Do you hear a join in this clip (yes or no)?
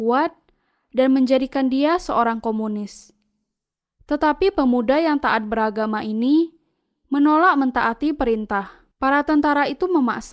yes